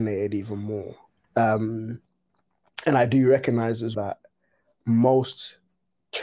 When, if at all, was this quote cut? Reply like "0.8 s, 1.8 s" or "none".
1.2 s, 3.9 s